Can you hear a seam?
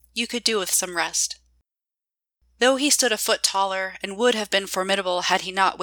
no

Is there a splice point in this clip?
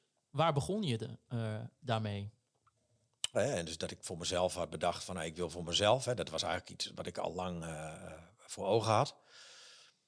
yes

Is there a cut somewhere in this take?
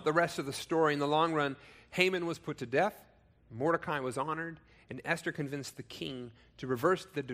no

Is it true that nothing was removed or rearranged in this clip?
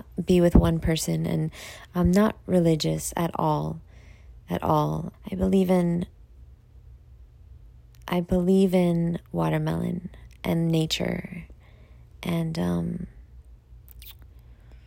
no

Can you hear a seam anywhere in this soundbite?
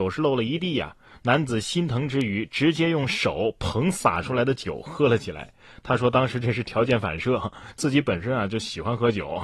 no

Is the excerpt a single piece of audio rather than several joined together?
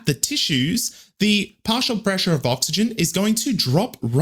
yes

